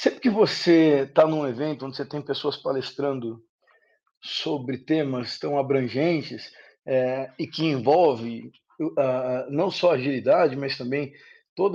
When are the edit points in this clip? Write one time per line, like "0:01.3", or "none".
none